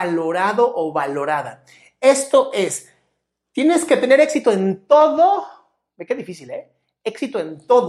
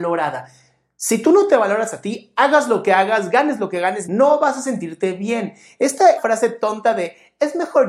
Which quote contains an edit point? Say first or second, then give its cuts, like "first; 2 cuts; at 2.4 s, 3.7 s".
second; 2 cuts; at 4.0 s, 6.2 s